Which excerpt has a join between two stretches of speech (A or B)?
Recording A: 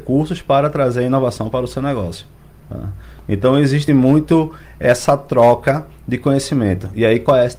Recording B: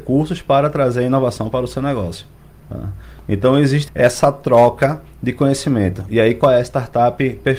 B